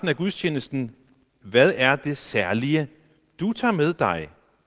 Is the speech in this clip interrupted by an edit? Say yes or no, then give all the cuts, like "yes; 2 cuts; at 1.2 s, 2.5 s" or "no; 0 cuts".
no; 0 cuts